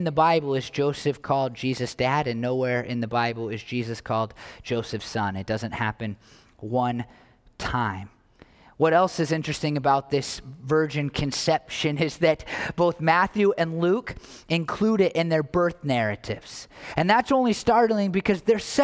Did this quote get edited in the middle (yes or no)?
no